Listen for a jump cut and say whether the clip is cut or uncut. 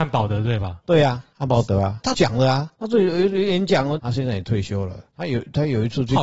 cut